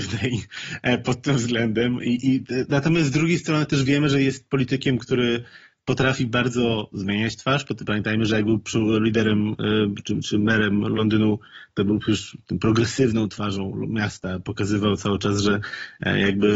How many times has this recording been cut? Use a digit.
0